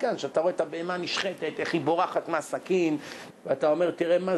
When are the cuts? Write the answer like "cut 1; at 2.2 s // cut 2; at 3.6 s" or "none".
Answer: cut 1; at 3.3 s